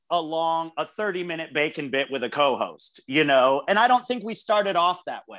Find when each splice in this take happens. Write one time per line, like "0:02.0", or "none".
none